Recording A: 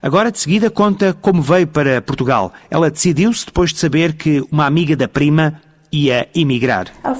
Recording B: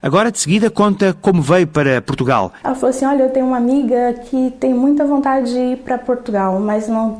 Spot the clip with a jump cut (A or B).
B